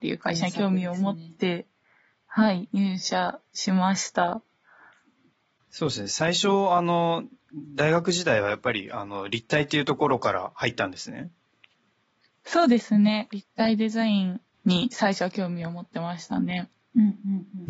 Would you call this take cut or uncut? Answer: uncut